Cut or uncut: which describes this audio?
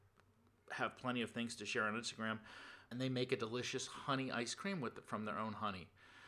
cut